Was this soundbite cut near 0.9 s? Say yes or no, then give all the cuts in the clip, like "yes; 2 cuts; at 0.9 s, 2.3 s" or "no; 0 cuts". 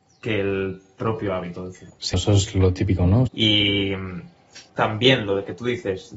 no; 3 cuts; at 2.1 s, 3.3 s, 4.7 s